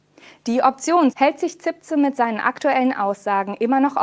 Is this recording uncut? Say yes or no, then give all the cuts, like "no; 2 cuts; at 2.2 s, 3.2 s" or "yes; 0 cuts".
no; 1 cut; at 1.1 s